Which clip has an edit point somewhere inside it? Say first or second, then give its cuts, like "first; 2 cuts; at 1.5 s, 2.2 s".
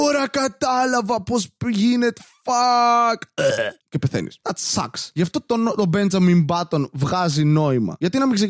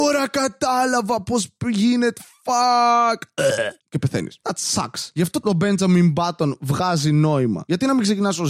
second; 1 cut; at 5.4 s